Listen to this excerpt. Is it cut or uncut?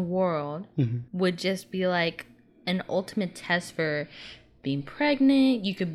cut